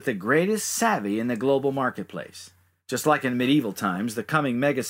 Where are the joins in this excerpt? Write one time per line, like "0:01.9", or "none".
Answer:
0:02.8